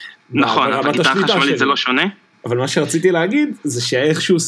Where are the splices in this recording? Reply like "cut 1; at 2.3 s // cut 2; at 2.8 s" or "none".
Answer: cut 1; at 2.3 s